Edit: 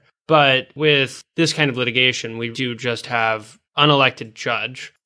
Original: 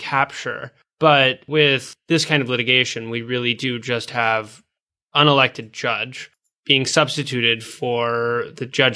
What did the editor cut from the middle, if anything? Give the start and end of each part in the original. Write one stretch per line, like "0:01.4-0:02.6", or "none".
0:03.2-0:03.6
0:04.7-0:05.0